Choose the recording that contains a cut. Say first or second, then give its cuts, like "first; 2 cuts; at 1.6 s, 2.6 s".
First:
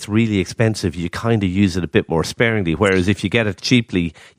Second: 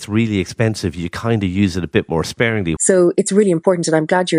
second; 1 cut; at 2.8 s